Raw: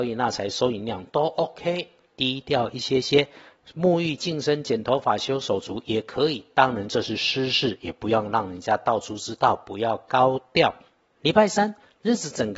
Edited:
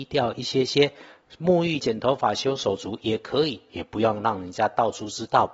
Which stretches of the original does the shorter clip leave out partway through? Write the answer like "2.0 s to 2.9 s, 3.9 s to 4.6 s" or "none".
4.2 s to 4.6 s, 6.5 s to 7.8 s